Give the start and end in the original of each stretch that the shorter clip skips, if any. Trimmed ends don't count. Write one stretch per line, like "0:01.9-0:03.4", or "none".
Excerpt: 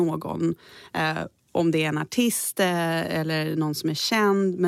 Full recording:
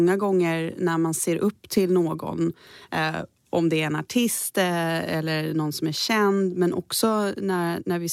none